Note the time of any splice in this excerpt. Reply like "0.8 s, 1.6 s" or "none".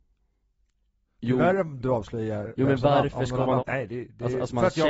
3.6 s